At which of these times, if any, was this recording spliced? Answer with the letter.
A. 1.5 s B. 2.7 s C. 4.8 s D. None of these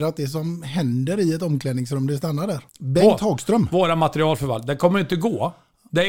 B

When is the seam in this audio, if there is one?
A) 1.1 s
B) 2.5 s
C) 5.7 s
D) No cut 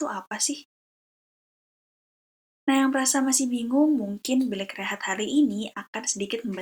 D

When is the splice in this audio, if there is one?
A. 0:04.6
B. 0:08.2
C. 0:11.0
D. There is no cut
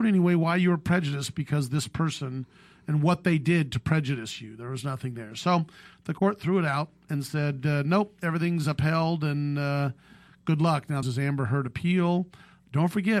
C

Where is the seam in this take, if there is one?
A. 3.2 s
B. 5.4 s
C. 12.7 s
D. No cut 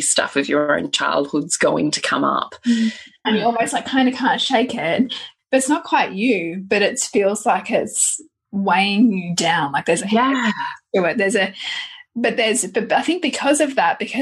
A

